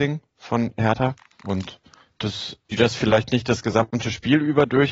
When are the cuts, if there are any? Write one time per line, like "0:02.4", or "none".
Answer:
0:02.6